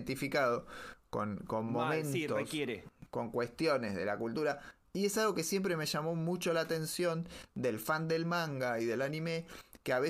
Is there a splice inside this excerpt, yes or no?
no